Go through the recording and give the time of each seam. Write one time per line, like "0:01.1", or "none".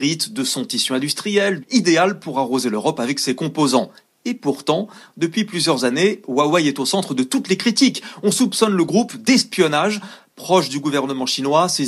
0:01.6